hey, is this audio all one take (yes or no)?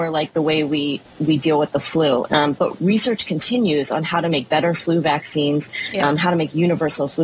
no